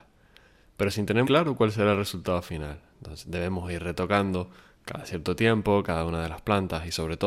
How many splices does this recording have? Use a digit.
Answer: 2